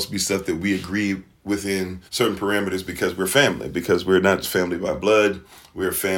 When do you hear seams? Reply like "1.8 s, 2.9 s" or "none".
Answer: 2.1 s, 4.4 s